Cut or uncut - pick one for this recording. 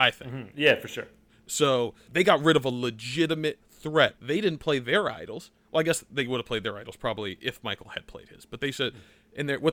cut